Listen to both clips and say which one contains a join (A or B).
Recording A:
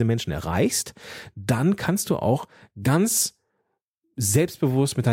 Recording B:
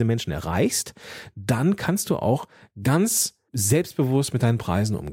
B